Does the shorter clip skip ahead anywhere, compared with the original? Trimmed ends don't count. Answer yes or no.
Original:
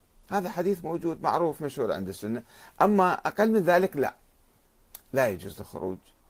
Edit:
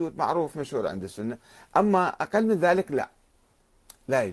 no